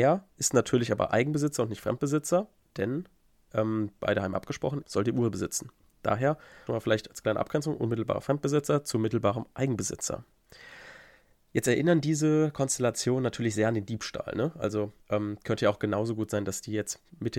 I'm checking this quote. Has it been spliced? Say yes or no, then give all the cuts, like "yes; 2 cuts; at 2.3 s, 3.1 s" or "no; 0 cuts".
yes; 3 cuts; at 4.8 s, 6.7 s, 15.0 s